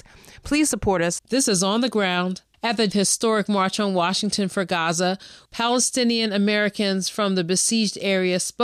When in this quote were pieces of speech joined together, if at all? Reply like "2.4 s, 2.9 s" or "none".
1.2 s, 2.5 s, 5.4 s